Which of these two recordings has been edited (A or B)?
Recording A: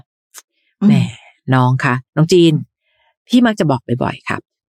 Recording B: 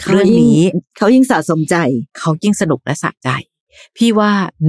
A